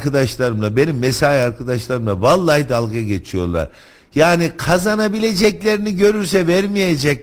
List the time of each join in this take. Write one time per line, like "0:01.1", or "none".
none